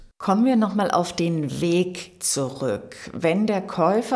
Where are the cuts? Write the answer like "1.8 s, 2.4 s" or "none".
none